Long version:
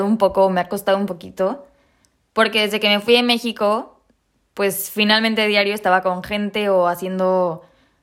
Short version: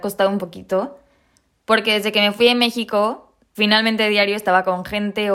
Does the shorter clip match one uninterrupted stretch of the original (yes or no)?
no